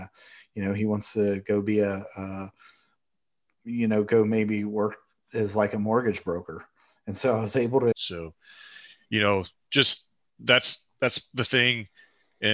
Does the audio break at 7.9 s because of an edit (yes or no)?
yes